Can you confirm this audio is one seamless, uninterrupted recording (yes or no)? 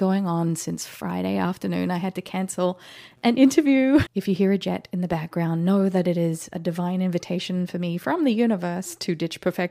no